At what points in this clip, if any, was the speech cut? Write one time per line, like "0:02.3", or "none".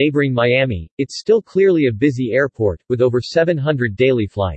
none